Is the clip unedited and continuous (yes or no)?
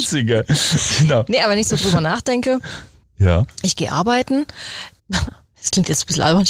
no